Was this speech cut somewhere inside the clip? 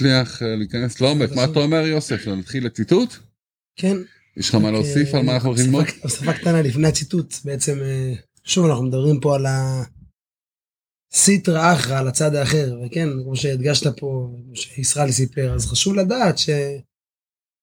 no; 0 cuts

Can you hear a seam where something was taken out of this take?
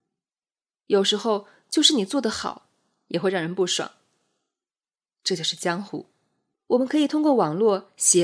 yes; 1 cut; at 6.5 s

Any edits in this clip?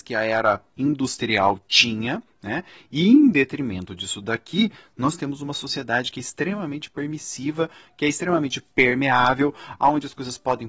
no; 0 cuts

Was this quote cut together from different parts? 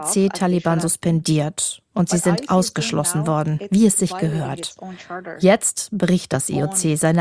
no; 0 cuts

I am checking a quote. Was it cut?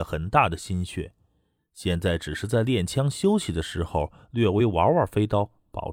no; 0 cuts

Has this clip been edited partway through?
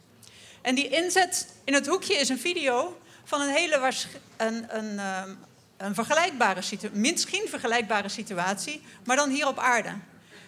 no; 0 cuts

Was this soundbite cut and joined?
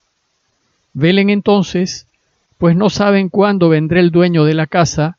no; 0 cuts

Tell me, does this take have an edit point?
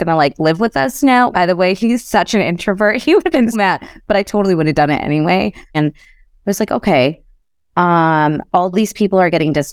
yes; 3 cuts; at 1.3 s, 3.5 s, 5.7 s

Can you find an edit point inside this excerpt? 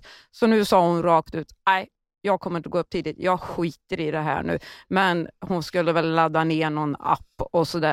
no; 0 cuts

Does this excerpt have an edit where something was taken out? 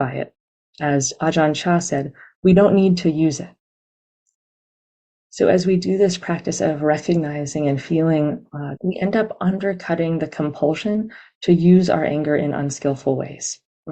yes; 1 cut; at 8.8 s

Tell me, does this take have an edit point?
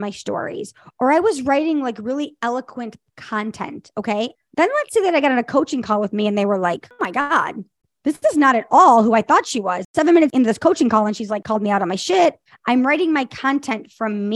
yes; 2 cuts; at 4.4 s, 12.5 s

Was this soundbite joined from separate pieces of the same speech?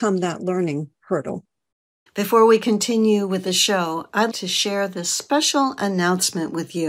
yes; 2 cuts; at 2.1 s, 4.3 s

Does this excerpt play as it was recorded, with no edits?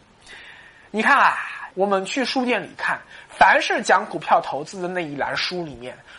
no; 1 cut; at 1.7 s

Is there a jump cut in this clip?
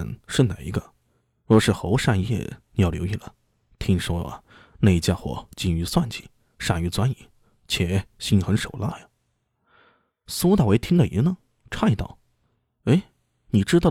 no; 0 cuts

